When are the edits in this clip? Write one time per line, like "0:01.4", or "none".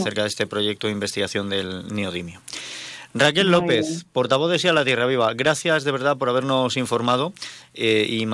none